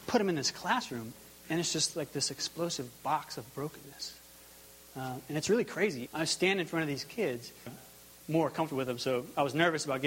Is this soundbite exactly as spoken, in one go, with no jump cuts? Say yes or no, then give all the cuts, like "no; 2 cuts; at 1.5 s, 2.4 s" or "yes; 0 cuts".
no; 2 cuts; at 6.1 s, 7.7 s